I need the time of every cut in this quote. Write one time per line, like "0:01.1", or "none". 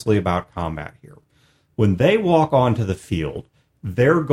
none